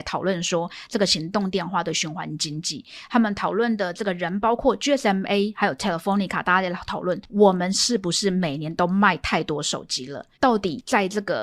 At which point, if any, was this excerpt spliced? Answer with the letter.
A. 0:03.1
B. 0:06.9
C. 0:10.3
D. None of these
C